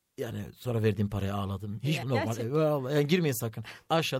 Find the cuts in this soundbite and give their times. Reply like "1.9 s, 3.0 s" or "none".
2.0 s